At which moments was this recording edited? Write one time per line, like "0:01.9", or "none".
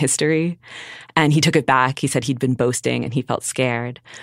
none